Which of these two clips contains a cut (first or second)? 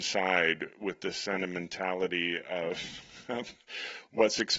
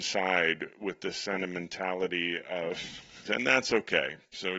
second